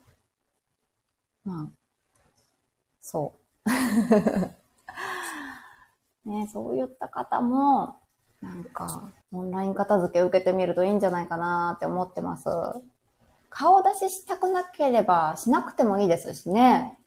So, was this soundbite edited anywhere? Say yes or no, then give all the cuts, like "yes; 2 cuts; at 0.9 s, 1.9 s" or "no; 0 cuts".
yes; 1 cut; at 9.2 s